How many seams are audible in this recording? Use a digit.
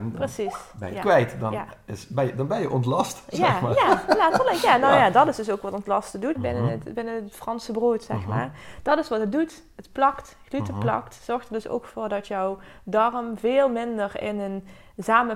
1